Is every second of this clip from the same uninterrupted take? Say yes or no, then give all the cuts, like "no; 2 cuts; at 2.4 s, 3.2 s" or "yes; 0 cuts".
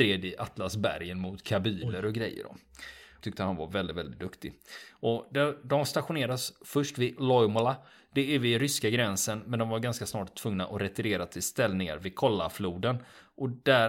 no; 1 cut; at 3.2 s